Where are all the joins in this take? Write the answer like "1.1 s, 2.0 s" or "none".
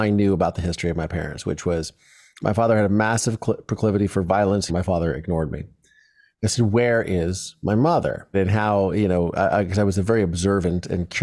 4.7 s, 8.3 s